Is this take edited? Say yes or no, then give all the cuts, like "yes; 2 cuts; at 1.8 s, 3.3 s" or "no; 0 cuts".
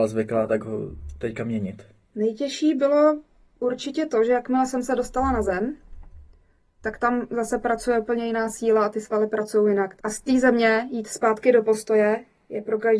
yes; 1 cut; at 10.0 s